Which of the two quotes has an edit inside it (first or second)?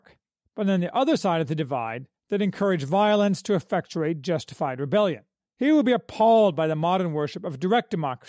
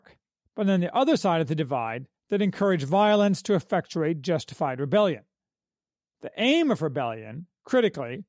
first